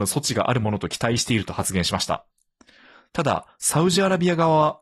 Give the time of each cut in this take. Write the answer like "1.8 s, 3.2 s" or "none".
none